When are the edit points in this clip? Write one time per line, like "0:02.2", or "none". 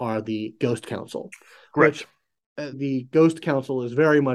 0:02.7